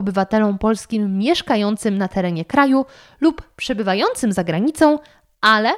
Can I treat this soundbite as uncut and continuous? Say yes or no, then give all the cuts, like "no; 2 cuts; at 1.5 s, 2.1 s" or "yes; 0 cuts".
yes; 0 cuts